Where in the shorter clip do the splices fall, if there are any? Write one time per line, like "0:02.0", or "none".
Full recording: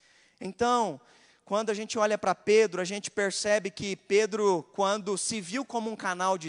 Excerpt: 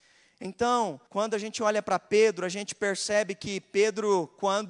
0:01.1